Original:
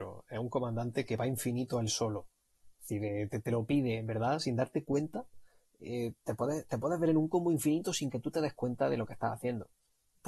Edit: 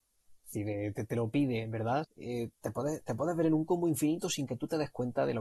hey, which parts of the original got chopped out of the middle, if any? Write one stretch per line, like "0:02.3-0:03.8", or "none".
0:04.4-0:05.7